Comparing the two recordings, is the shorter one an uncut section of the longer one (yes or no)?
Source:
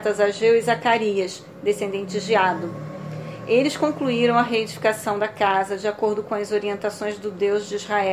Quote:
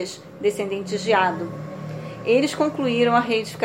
yes